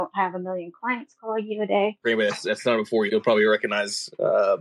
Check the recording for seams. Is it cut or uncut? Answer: cut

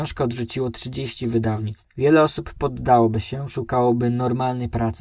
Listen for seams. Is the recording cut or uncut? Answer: uncut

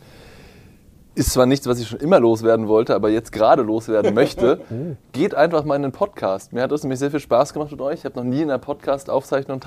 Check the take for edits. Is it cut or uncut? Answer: uncut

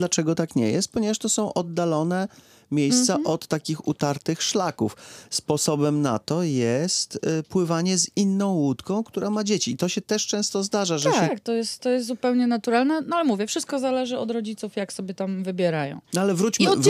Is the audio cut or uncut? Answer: cut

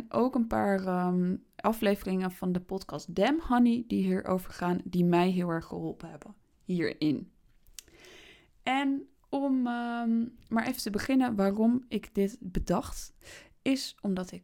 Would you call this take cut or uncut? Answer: uncut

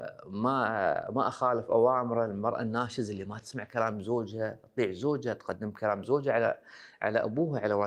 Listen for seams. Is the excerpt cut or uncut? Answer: uncut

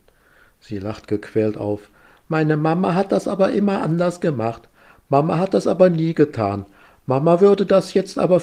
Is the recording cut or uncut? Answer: uncut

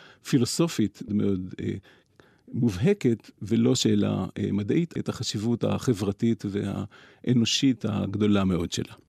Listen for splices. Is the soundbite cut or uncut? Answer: cut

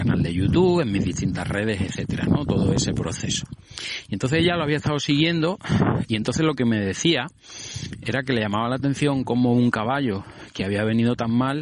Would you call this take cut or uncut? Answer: cut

